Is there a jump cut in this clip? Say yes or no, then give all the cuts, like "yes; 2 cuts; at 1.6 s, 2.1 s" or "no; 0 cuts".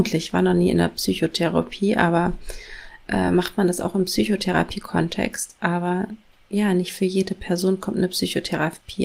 no; 0 cuts